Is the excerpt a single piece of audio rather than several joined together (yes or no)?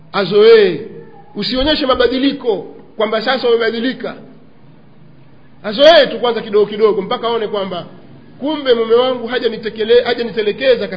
yes